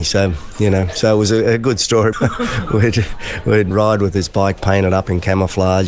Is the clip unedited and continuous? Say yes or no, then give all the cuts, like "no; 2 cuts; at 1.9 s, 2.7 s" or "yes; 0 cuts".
no; 2 cuts; at 2.1 s, 3.7 s